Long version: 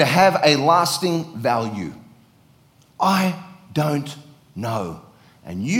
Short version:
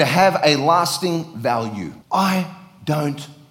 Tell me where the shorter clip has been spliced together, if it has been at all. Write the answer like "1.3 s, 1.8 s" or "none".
2.0 s